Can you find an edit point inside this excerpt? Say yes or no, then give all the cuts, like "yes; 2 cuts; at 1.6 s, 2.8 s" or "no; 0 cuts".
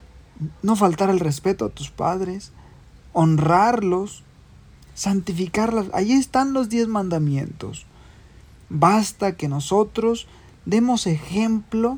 no; 0 cuts